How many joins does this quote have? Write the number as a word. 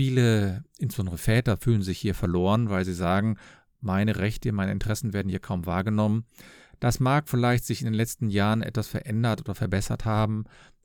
zero